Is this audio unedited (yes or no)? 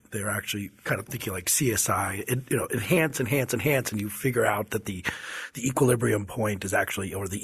yes